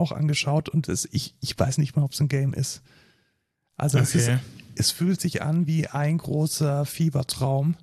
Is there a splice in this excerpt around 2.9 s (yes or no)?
no